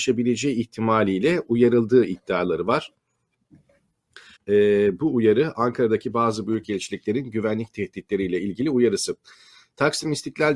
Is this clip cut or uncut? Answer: cut